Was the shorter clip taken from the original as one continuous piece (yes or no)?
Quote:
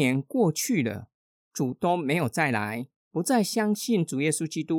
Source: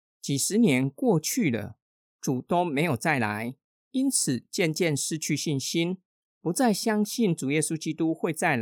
no